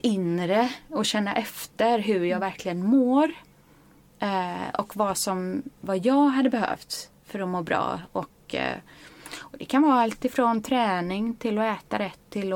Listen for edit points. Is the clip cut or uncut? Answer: uncut